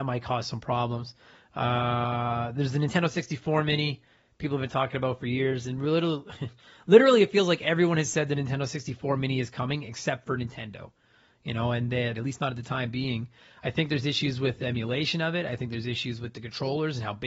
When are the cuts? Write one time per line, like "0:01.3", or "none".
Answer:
0:12.1